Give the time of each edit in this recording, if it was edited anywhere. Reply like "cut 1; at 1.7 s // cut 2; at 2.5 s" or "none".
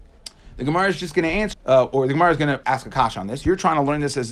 cut 1; at 1.5 s // cut 2; at 2.6 s

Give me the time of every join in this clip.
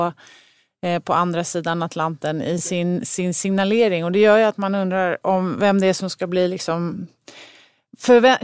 none

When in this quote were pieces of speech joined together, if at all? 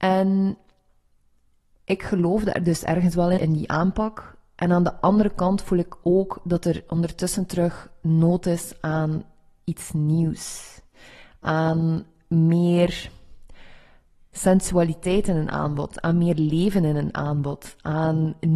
cut 1; at 3.4 s

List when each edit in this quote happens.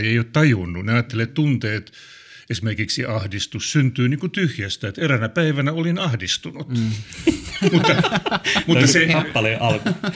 none

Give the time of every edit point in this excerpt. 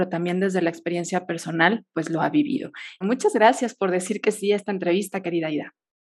cut 1; at 3.0 s

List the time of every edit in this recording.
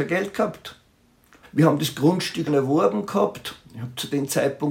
cut 1; at 1.4 s // cut 2; at 2.5 s

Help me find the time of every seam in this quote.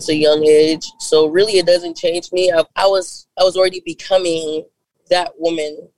cut 1; at 2.7 s

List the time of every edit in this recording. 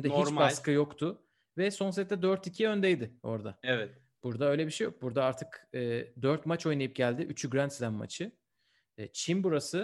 none

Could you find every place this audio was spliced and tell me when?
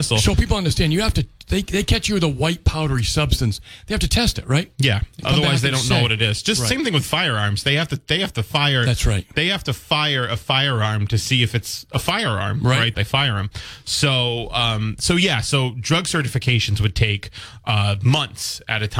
cut 1; at 12.9 s

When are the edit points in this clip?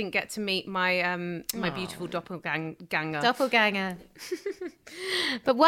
none

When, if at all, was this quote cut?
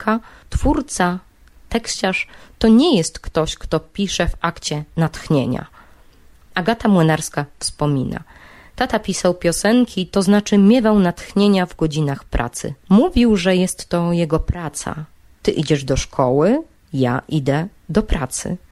cut 1; at 12.8 s

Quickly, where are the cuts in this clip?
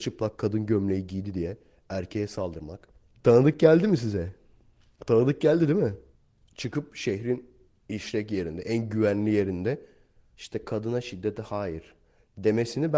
cut 1; at 3.1 s

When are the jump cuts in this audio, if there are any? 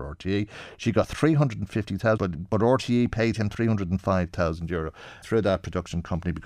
cut 1; at 2.2 s // cut 2; at 5.2 s

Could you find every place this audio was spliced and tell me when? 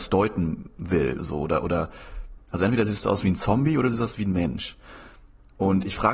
cut 1; at 2.4 s

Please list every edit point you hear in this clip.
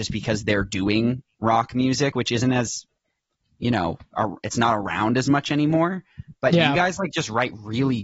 none

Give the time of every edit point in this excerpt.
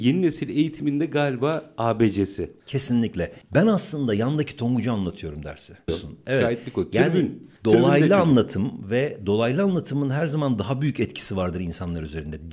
cut 1; at 5.9 s

